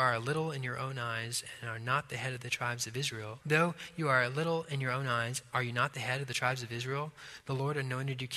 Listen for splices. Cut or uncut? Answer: cut